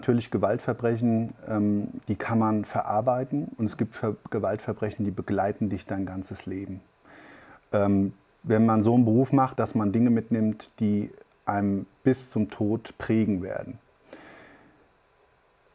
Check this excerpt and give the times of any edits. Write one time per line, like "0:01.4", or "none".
0:09.6